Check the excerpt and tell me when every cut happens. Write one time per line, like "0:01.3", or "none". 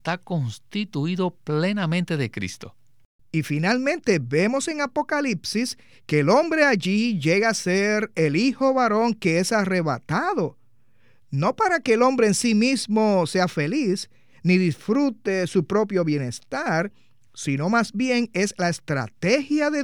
0:03.2